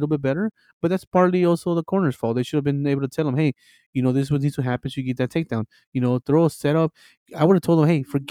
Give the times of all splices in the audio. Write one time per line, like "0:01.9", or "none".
0:05.8